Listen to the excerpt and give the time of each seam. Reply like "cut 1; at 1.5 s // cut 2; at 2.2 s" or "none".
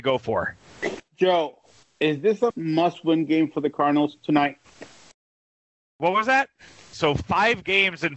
cut 1; at 2.5 s // cut 2; at 6.9 s